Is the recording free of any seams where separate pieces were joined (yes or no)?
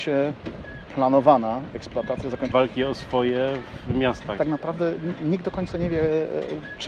no